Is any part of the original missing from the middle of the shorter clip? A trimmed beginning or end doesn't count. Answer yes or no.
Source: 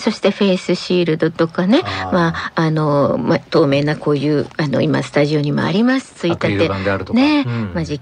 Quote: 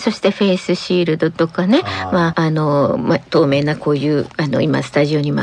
yes